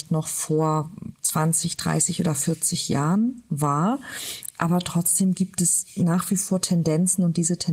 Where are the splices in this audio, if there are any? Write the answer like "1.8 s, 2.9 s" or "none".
none